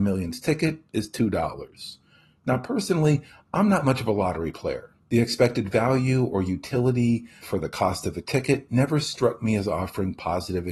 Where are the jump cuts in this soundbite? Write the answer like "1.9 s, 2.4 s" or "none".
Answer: 5.0 s, 7.4 s